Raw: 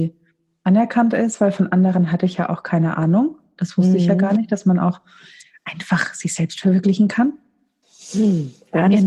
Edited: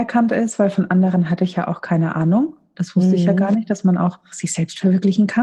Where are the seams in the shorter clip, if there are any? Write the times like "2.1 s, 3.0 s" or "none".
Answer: 4.3 s